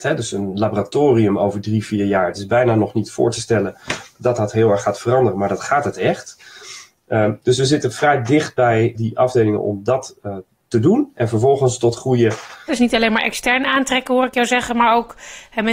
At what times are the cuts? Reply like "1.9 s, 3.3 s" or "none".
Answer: 8.9 s, 12.7 s